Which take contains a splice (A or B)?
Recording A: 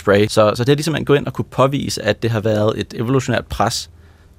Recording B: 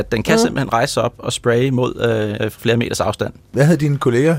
B